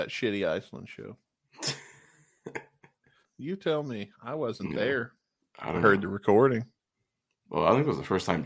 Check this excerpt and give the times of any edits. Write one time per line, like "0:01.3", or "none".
0:03.2